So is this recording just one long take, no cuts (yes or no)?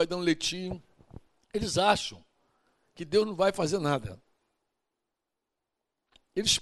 yes